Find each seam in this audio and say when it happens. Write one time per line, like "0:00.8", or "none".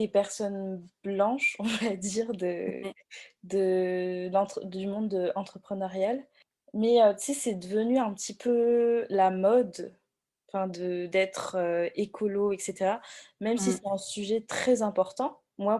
none